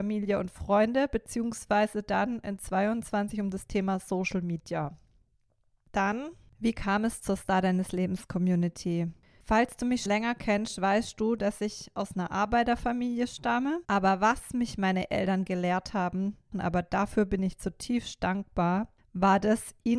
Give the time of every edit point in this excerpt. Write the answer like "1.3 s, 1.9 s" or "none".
10.1 s, 13.8 s, 16.5 s